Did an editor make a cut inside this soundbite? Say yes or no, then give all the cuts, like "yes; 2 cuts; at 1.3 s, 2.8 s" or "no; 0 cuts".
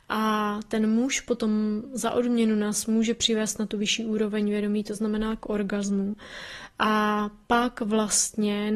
no; 0 cuts